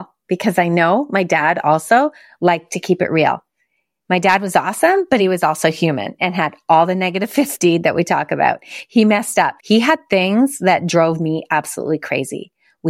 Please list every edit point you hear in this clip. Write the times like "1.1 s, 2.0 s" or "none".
9.6 s